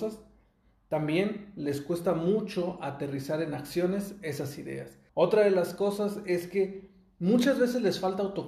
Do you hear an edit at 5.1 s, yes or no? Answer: yes